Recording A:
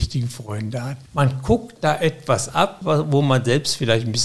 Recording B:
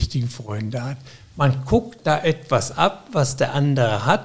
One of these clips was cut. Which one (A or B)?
A